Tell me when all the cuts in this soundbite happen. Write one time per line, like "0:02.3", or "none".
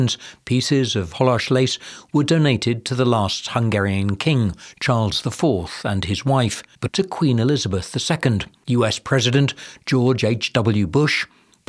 0:06.9